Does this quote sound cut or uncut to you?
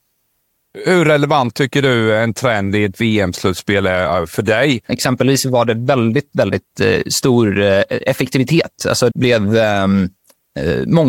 cut